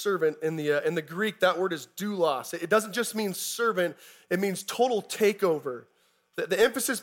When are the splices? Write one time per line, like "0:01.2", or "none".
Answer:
none